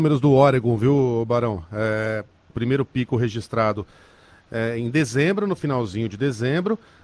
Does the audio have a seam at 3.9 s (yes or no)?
no